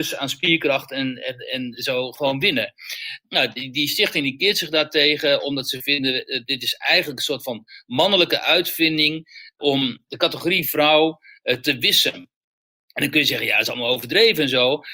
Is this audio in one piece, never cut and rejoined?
yes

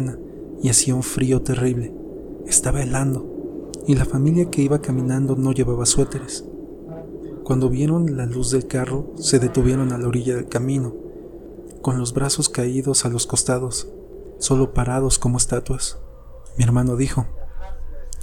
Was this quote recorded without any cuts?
no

